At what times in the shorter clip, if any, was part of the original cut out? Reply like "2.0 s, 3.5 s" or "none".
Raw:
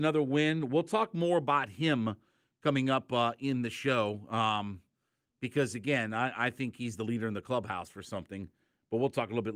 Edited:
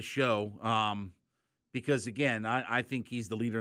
none